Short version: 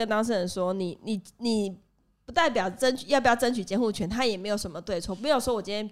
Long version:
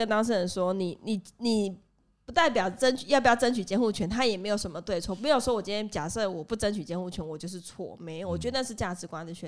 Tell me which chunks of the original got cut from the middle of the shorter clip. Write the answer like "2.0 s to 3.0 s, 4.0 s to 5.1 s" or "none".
none